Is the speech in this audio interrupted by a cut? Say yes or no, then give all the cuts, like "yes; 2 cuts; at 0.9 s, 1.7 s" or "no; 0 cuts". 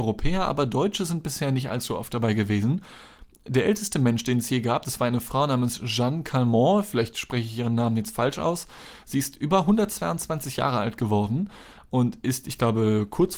no; 0 cuts